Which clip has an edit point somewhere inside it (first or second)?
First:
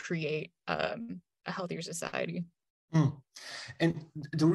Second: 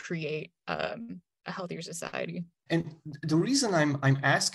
second